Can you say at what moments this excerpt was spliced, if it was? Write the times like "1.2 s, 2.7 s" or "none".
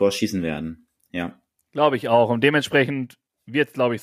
none